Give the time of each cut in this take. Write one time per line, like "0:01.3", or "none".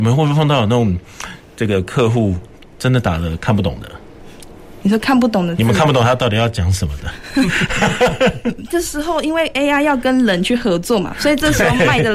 none

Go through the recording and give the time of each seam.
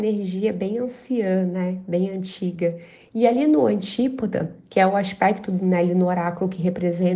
0:03.1

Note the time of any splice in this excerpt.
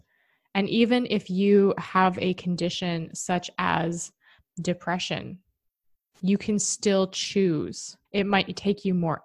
0:08.0

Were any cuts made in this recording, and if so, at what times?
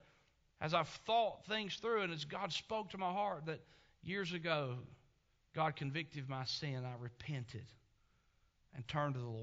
none

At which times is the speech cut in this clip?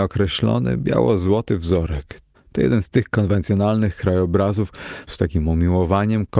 0:02.3
0:05.1

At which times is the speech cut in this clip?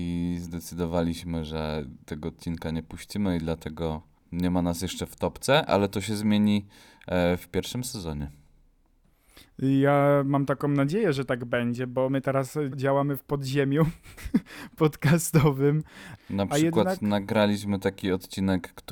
0:12.7
0:16.2

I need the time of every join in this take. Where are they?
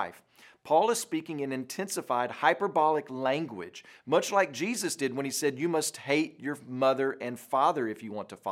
none

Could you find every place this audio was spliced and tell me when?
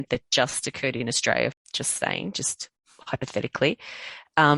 0:01.5

